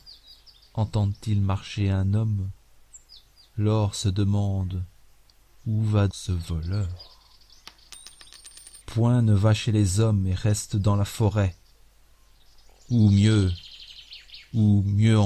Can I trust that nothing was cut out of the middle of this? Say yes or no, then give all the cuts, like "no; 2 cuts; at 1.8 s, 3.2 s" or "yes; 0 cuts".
no; 2 cuts; at 6.1 s, 8.8 s